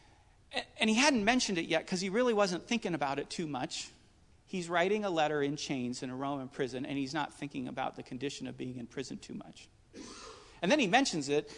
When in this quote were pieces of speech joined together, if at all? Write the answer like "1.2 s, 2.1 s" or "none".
4.3 s